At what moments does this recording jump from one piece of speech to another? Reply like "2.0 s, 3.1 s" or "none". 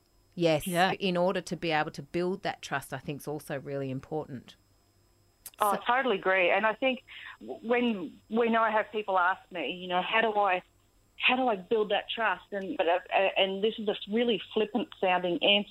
0.9 s, 12.8 s

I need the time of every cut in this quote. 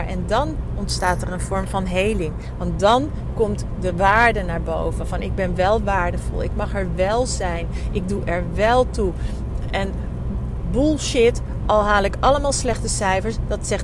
none

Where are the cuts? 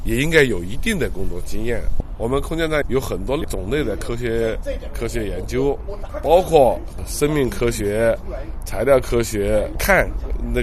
none

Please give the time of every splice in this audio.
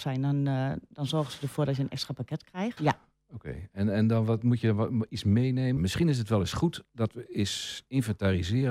2.8 s, 5.8 s

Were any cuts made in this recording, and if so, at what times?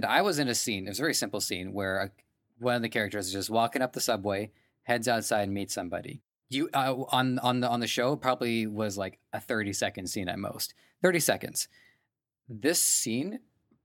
none

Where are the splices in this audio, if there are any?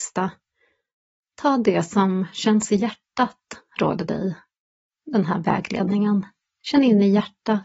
none

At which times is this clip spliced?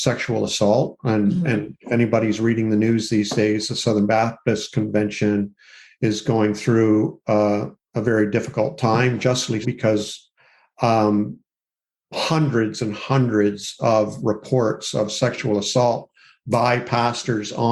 9.6 s

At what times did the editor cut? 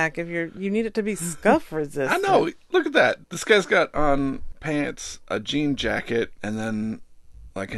3.2 s, 4.5 s

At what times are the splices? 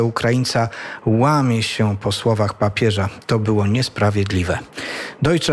none

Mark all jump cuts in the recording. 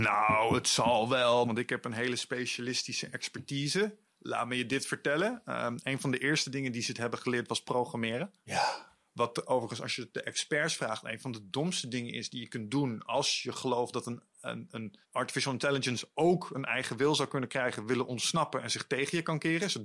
1.4 s, 15.0 s

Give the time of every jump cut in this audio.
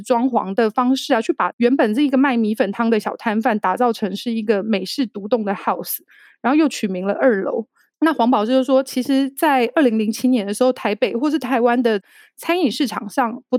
7.9 s

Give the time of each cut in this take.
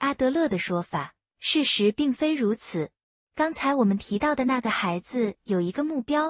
3.2 s

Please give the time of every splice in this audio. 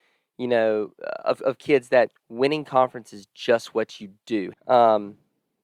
4.5 s

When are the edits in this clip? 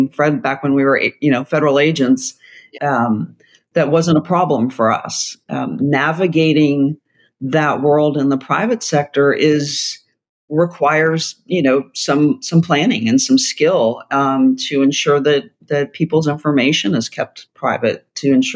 2.8 s

